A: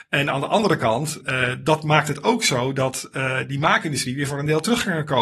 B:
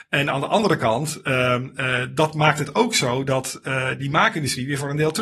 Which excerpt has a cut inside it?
A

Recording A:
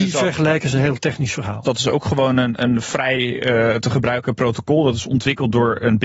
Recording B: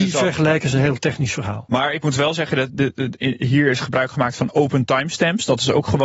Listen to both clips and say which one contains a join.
A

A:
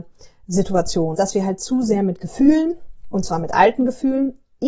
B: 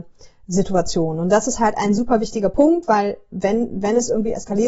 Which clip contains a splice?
A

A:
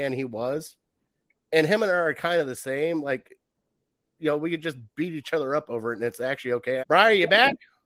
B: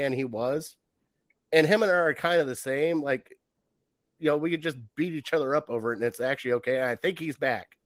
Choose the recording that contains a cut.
A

